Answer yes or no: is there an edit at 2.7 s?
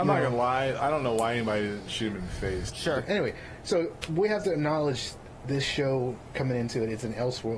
yes